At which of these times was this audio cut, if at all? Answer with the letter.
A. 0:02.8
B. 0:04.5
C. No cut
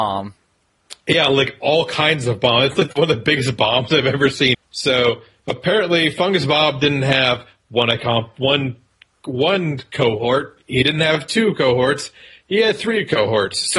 B